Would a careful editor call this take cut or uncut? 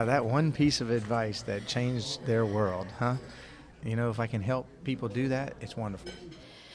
cut